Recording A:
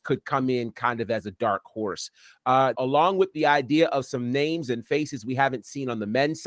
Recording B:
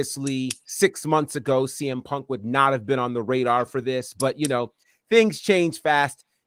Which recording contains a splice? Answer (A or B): A